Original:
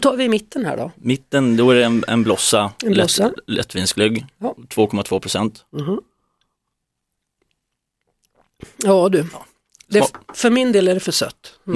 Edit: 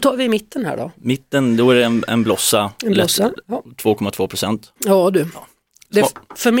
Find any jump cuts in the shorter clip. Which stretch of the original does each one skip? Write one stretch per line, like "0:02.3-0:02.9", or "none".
0:03.4-0:04.3
0:05.7-0:08.7